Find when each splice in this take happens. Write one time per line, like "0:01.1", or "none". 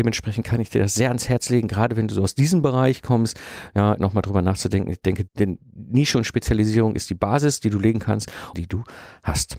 0:04.0
0:05.3
0:08.5

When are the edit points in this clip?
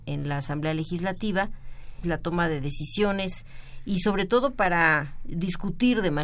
0:02.0

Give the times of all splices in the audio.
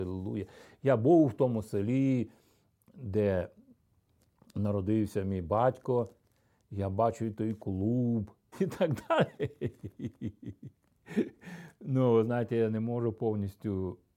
0:08.5

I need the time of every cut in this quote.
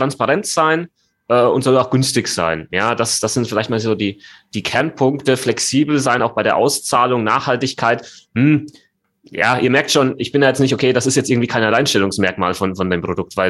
none

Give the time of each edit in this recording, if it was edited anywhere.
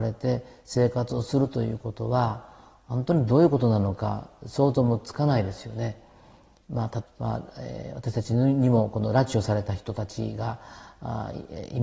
0:07.0

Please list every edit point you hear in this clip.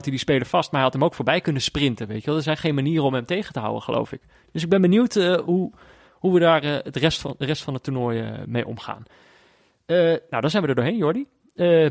none

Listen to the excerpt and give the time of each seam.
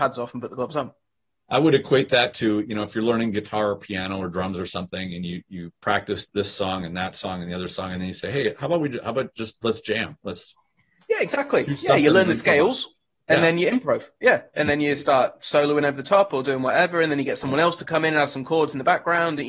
0:06.3

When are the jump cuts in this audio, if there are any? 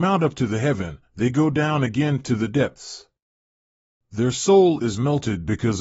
none

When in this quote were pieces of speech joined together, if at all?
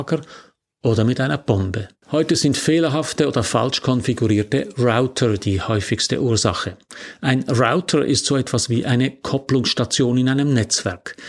0:02.0

